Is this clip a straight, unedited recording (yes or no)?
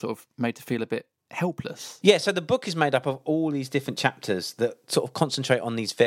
yes